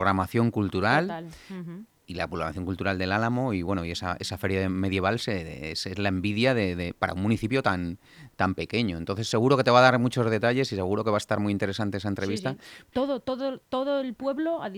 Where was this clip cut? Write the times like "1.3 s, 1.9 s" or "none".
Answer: 12.9 s